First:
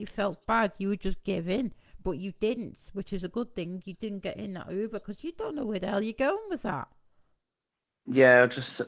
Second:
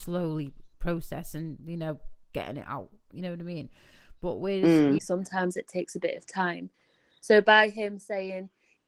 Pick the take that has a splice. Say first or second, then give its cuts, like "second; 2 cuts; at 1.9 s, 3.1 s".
second; 1 cut; at 5.0 s